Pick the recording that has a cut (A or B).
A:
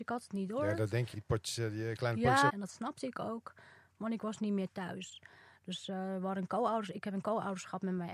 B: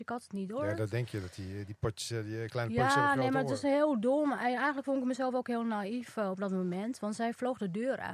A